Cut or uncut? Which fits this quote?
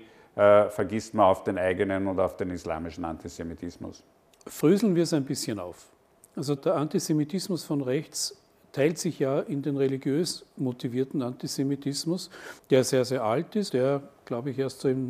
cut